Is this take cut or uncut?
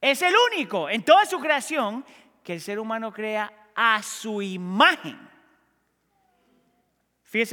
uncut